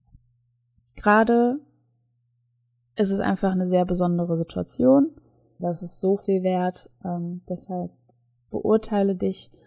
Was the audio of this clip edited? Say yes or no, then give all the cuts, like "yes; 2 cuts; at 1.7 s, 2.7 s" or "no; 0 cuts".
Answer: yes; 1 cut; at 5.6 s